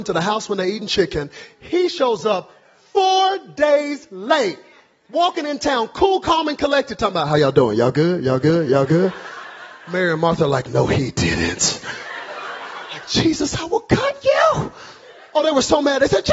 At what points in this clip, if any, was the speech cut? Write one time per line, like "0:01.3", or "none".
none